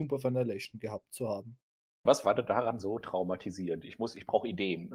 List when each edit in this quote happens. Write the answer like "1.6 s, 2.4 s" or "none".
2.1 s